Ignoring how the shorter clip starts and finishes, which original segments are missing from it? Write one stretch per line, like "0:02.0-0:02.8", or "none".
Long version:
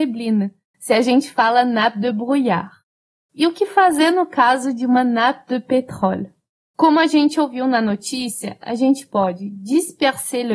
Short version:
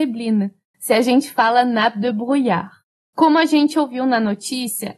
0:03.0-0:06.6